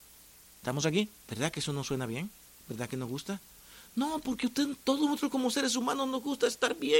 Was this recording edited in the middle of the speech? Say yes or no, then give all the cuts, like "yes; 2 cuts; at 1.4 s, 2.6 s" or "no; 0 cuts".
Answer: yes; 1 cut; at 1.2 s